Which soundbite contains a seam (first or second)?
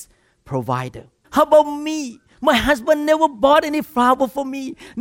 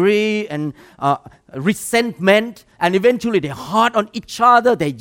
first